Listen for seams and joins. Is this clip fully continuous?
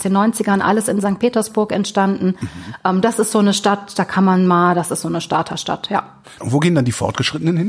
no; 1 cut; at 6.4 s

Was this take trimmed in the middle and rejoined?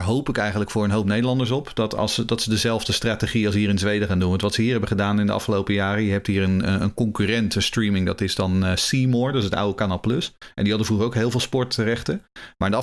no; 0 cuts

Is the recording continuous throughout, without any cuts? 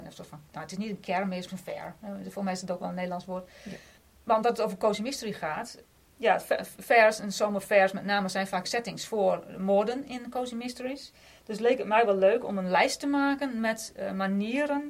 no; 1 cut; at 1.5 s

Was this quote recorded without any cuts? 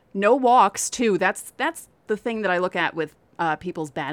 yes; 0 cuts

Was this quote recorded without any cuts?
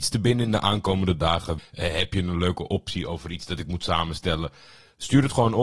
no; 1 cut; at 1.6 s

